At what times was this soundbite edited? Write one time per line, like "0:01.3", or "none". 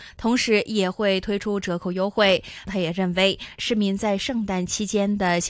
0:02.7